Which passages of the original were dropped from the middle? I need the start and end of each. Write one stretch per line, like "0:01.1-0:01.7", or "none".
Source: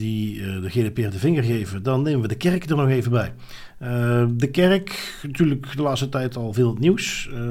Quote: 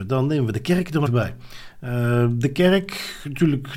0:02.8-0:03.0